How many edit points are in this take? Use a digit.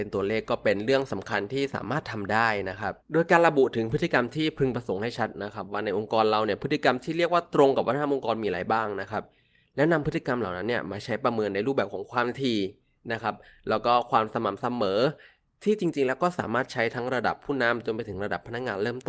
1